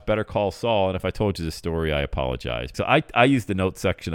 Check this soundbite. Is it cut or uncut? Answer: cut